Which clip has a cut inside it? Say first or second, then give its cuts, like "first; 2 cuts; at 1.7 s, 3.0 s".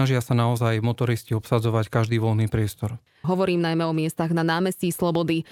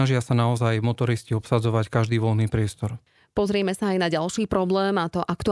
first; 1 cut; at 3.2 s